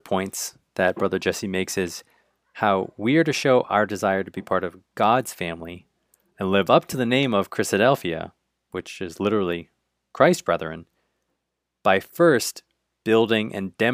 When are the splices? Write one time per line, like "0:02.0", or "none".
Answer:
none